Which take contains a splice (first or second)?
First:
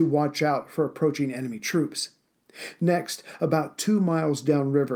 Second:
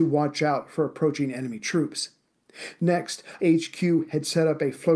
second